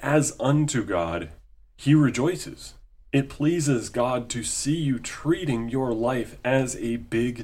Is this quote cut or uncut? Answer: uncut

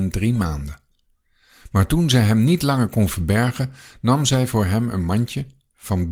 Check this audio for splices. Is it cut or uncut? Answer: uncut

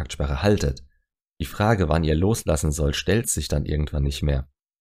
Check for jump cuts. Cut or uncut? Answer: uncut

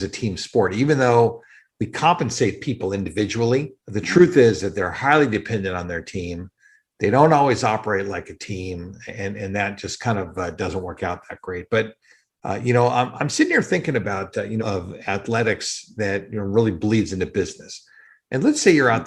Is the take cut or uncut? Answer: cut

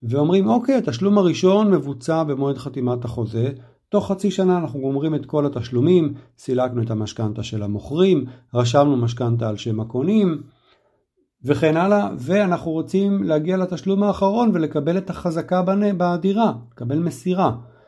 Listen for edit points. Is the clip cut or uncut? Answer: uncut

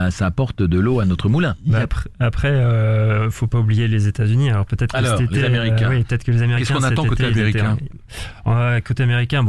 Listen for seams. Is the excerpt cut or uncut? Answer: uncut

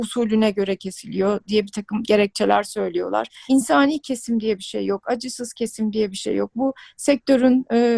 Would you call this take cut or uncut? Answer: cut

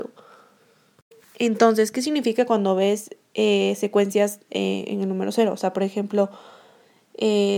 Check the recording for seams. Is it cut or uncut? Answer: uncut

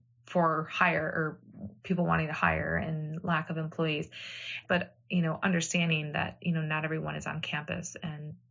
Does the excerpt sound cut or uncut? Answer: cut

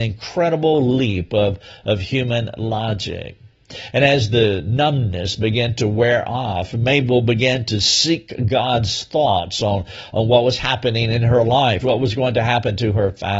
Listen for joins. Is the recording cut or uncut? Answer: cut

